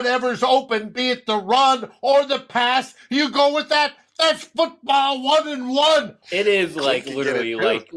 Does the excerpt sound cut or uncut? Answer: cut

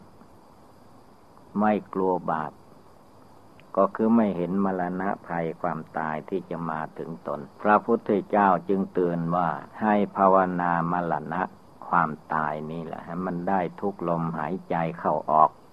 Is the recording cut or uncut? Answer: cut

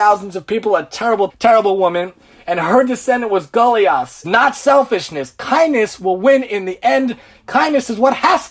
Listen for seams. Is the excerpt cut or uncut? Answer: cut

